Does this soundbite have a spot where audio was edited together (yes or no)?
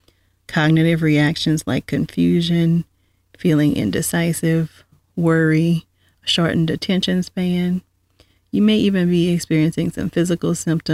no